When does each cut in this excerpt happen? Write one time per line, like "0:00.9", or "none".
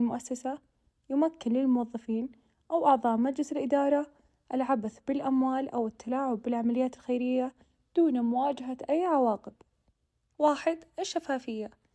0:10.3

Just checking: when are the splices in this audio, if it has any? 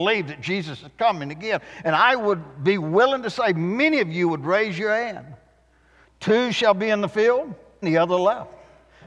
0:06.0
0:07.8

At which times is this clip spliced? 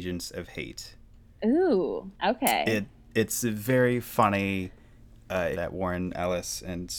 0:02.1
0:05.5

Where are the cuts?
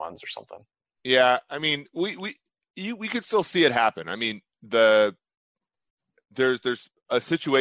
none

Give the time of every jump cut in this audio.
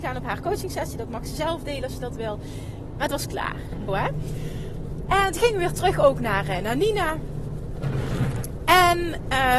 0:03.9

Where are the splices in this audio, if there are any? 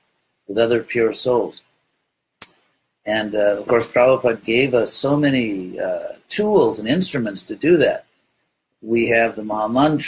none

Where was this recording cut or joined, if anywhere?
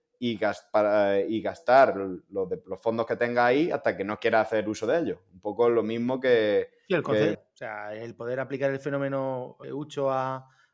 0:07.3
0:09.6

